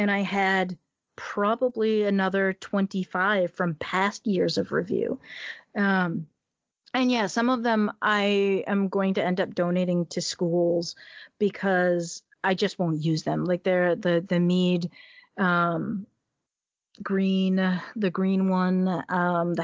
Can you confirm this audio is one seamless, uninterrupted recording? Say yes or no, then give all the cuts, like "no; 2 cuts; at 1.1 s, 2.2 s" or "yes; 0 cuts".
yes; 0 cuts